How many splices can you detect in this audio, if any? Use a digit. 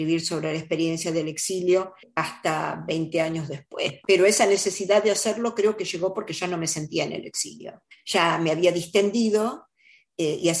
0